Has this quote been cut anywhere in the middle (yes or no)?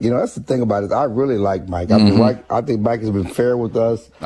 no